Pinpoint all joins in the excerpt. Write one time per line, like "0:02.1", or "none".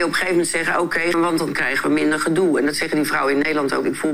0:01.1